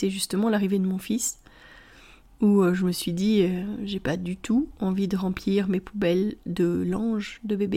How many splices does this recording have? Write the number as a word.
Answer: zero